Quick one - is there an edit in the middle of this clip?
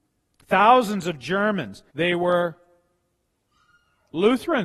yes; 1 cut; at 1.9 s

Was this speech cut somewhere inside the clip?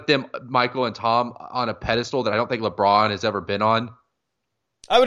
no; 0 cuts

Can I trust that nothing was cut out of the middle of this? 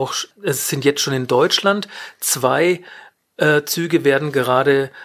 yes; 0 cuts

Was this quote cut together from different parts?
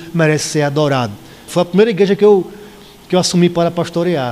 yes; 1 cut; at 1.5 s

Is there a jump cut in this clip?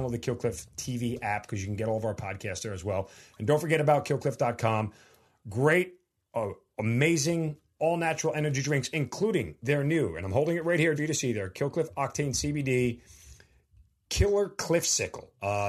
yes; 1 cut; at 11.0 s

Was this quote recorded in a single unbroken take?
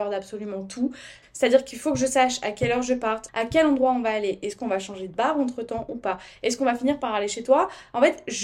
no; 2 cuts; at 1.2 s, 3.3 s

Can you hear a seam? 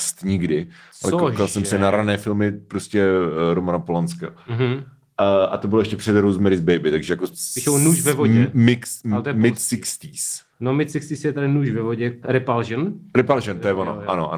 yes; 2 cuts; at 10.5 s, 12.2 s

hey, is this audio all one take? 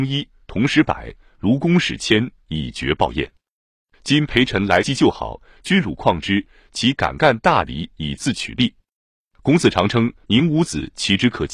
yes; 0 cuts

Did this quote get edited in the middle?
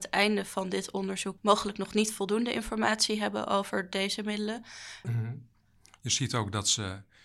yes; 2 cuts; at 1.4 s, 5.0 s

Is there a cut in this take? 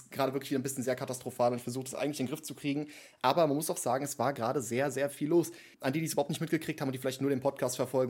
yes; 1 cut; at 5.7 s

